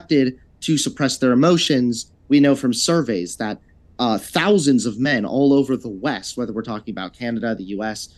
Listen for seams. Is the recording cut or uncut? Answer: cut